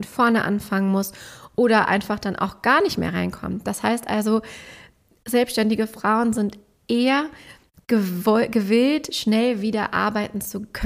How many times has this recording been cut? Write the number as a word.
zero